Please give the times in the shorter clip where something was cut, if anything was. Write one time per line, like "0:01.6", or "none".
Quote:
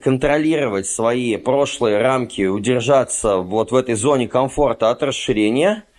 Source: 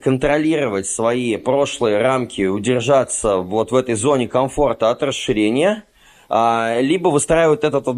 none